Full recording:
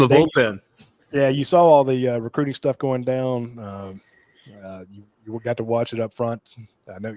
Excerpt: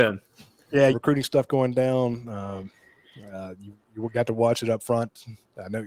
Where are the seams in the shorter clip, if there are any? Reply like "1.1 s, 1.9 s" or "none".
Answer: 0.9 s